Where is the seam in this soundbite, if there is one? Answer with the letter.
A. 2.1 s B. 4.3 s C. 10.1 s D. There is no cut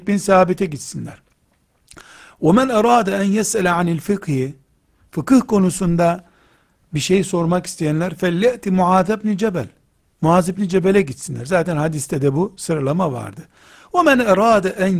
D